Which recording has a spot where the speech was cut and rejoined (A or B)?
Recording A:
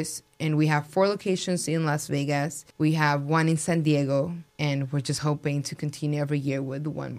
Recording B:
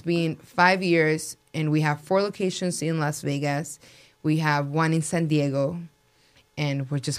A